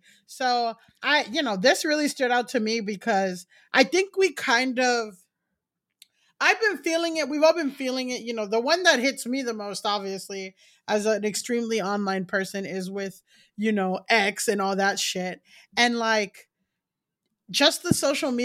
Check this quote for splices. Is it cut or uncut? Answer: uncut